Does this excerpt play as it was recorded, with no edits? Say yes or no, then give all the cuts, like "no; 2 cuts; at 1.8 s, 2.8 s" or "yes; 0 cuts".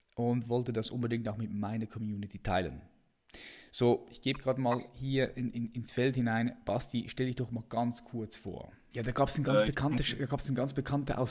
no; 1 cut; at 8.9 s